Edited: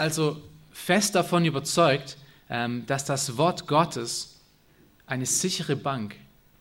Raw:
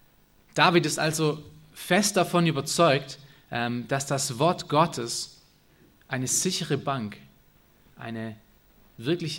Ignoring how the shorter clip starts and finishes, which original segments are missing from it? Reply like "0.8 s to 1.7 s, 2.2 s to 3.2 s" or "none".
none